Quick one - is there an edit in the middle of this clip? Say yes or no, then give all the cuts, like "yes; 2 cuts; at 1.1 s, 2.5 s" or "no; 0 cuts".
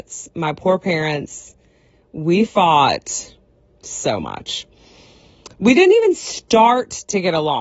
no; 0 cuts